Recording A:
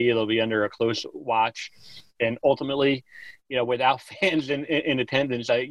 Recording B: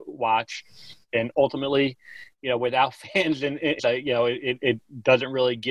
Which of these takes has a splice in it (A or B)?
B